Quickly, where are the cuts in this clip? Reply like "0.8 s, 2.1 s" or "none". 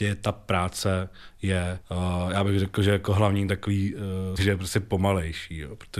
1.8 s, 4.4 s